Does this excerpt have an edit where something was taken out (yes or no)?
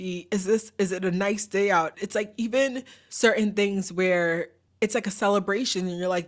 yes